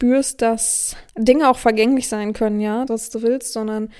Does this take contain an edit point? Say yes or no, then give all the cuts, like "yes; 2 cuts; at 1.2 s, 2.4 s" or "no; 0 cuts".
yes; 2 cuts; at 1.1 s, 2.9 s